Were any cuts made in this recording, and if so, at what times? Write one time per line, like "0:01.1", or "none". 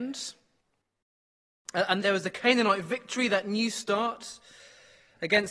0:02.0